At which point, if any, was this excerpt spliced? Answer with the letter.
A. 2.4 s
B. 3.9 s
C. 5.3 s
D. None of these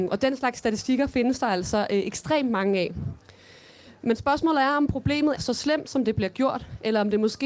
C